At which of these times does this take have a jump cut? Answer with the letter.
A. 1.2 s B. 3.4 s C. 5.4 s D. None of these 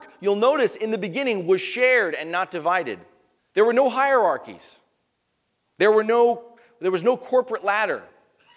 B